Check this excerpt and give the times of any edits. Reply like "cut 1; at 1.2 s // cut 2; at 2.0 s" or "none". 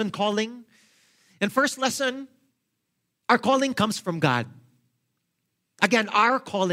none